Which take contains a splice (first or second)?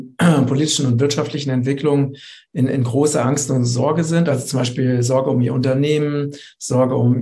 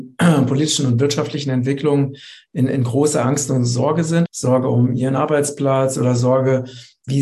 second